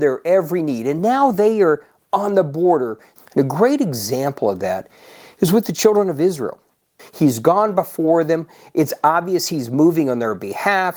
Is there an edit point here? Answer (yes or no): yes